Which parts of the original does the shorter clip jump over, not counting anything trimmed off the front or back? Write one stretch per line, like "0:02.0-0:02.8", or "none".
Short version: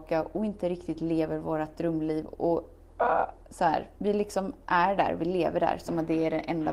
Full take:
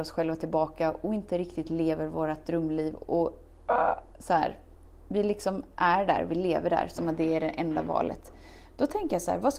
0:04.6-0:05.1